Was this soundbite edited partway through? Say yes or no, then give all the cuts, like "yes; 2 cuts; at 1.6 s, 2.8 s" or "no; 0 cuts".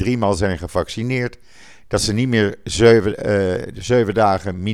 no; 0 cuts